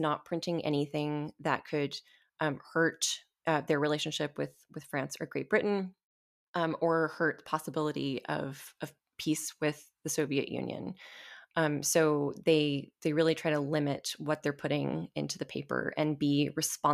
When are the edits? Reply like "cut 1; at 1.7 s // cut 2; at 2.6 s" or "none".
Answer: none